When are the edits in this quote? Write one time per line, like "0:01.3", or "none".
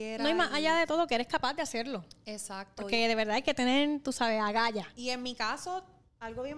none

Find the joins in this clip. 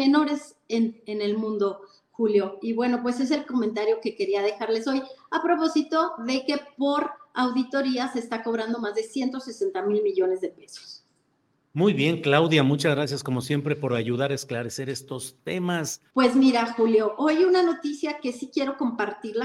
0:16.1

